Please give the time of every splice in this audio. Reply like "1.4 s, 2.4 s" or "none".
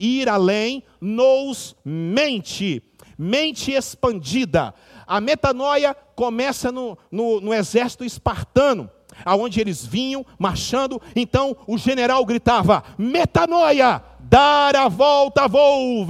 none